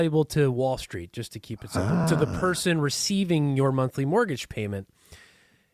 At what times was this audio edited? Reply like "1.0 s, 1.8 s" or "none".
none